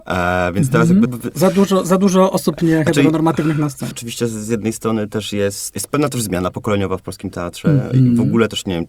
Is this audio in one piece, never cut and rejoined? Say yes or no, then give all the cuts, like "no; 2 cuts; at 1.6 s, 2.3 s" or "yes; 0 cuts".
no; 3 cuts; at 1.0 s, 3.9 s, 5.7 s